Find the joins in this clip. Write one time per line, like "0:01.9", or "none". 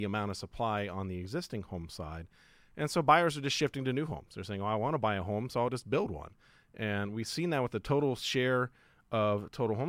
none